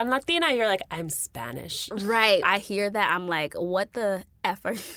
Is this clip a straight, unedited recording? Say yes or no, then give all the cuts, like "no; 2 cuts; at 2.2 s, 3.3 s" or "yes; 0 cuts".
no; 1 cut; at 2.4 s